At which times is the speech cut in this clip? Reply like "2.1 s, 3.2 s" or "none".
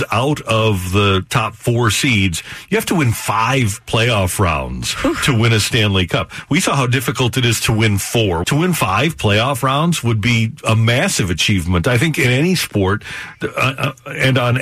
8.4 s